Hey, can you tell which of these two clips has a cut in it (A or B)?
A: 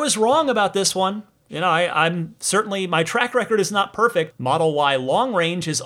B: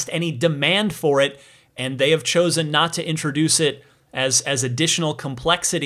A